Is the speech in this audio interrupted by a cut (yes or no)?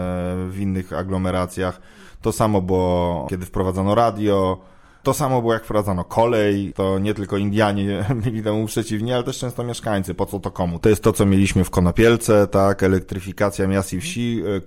yes